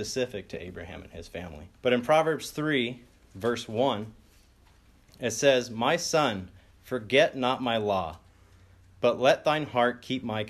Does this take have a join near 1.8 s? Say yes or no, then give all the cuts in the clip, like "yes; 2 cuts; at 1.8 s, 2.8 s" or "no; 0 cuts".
yes; 1 cut; at 1.8 s